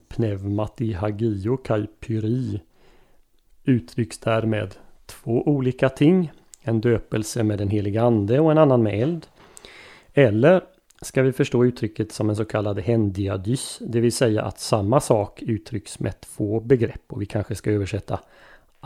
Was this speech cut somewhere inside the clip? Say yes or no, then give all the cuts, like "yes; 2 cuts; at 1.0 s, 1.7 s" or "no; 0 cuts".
no; 0 cuts